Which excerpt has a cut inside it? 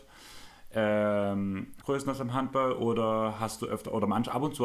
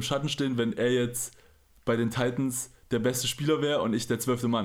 first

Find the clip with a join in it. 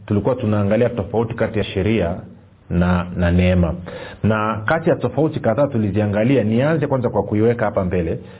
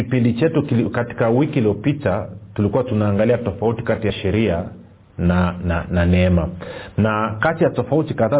first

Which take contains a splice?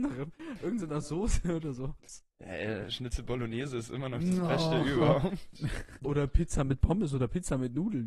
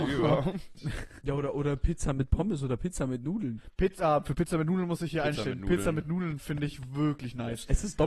first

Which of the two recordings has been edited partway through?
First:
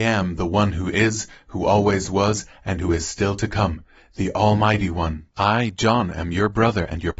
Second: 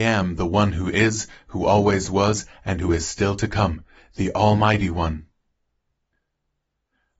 first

